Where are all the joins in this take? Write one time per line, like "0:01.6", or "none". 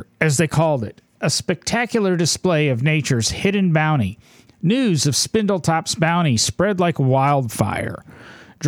0:01.1
0:04.5